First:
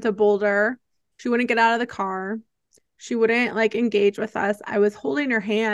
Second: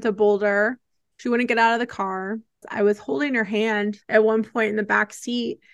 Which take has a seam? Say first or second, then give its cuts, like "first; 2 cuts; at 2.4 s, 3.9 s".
second; 2 cuts; at 2.6 s, 4.0 s